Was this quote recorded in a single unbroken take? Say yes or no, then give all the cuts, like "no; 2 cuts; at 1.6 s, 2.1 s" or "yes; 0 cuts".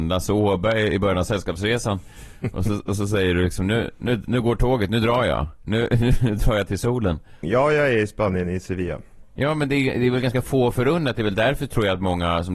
no; 1 cut; at 7.4 s